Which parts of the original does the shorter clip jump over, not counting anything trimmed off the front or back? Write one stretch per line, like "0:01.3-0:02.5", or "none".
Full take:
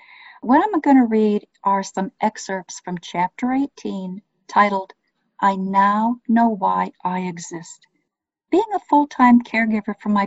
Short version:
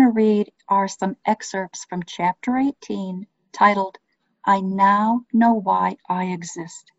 none